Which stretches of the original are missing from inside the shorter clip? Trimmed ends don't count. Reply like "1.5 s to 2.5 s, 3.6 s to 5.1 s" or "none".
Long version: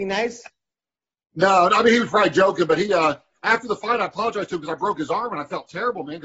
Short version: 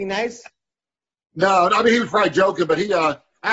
none